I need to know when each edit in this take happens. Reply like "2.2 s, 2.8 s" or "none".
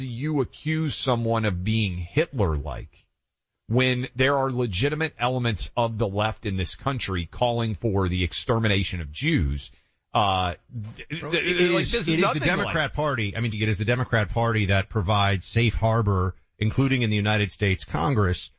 13.5 s

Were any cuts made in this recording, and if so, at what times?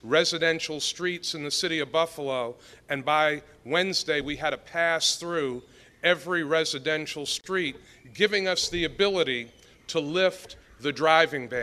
none

